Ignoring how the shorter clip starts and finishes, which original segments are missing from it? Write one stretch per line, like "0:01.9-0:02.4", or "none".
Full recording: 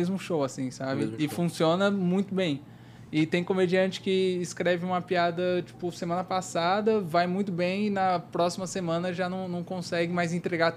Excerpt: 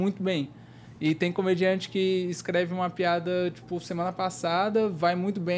none